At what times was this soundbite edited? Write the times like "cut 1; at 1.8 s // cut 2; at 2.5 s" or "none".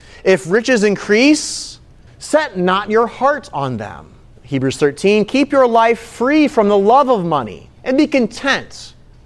cut 1; at 2.1 s // cut 2; at 4.4 s // cut 3; at 7.7 s